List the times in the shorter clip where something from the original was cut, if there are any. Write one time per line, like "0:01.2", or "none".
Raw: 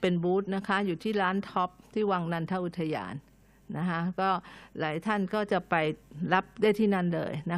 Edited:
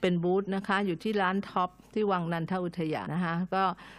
0:03.1